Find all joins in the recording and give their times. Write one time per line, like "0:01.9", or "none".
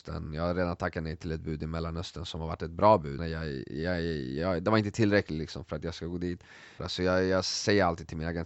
0:03.2
0:06.8